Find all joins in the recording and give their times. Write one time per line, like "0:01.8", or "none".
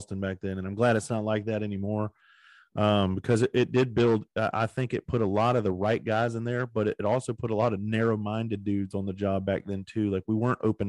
none